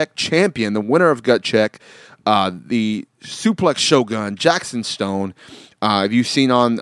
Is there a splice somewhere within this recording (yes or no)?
no